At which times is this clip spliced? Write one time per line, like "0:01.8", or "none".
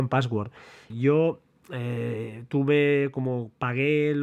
0:00.9